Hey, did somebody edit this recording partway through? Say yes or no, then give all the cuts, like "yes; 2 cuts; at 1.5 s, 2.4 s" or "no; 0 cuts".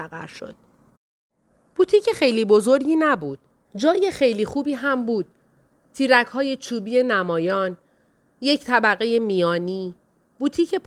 yes; 1 cut; at 3.6 s